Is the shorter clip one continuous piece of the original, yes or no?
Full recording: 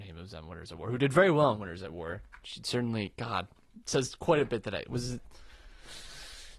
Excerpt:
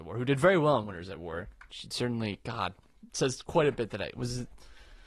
yes